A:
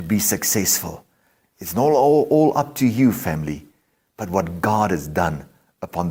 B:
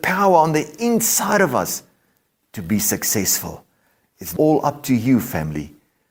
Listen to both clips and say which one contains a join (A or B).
B